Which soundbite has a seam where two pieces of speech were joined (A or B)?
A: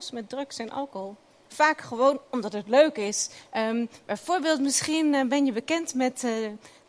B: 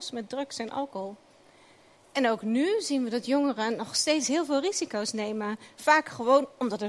A